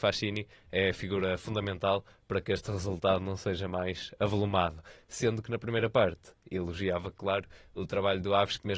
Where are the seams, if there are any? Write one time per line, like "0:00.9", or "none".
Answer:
none